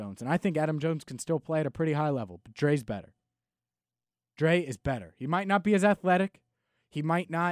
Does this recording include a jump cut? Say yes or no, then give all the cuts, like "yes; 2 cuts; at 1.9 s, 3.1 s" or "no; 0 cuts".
no; 0 cuts